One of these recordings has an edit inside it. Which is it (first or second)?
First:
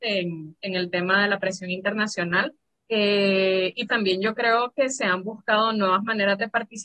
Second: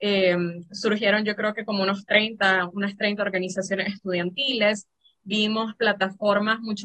first